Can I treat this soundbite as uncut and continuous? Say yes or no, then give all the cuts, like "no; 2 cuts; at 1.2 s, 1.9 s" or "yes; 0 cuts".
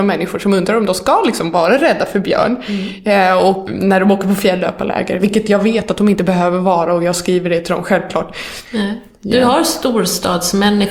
no; 2 cuts; at 3.7 s, 8.7 s